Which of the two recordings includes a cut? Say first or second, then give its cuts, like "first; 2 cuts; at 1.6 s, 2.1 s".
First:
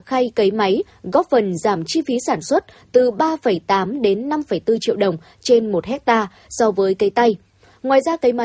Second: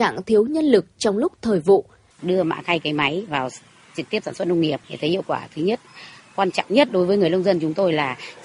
second; 2 cuts; at 2.1 s, 4.8 s